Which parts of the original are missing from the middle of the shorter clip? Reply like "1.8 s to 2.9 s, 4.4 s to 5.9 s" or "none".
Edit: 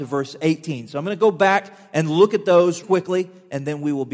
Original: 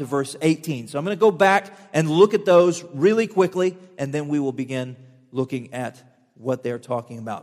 2.8 s to 3.3 s